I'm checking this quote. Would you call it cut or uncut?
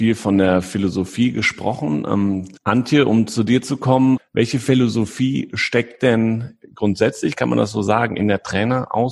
cut